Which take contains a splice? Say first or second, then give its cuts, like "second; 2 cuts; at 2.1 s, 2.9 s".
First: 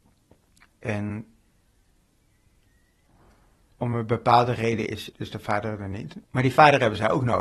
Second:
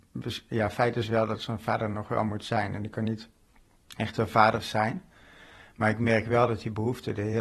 first; 2 cuts; at 5.1 s, 6.2 s